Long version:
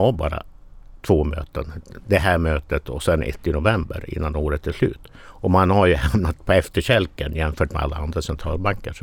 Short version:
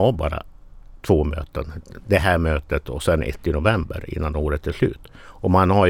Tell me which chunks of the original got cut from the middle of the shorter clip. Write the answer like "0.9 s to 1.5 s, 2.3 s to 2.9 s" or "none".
none